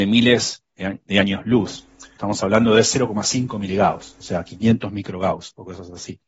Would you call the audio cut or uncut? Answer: cut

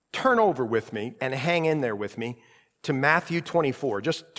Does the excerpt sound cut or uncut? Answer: cut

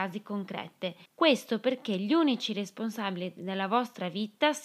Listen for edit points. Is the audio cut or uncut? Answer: cut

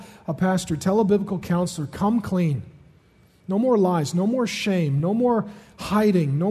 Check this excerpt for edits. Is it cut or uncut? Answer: uncut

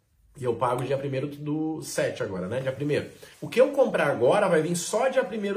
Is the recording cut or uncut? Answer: cut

